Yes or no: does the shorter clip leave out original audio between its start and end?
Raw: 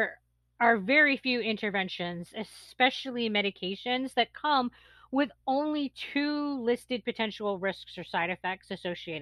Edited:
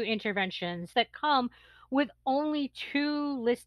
yes